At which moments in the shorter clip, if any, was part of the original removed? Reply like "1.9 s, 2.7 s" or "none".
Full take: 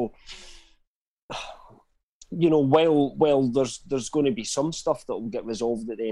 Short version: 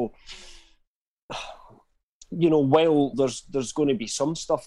3.1 s